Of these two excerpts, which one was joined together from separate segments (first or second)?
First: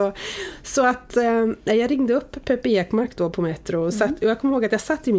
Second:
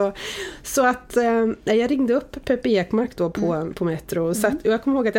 first